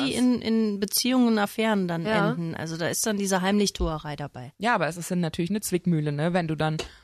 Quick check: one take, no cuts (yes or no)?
yes